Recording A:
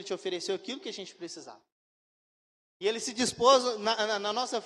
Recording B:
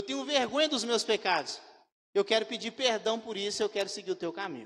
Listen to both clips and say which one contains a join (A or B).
B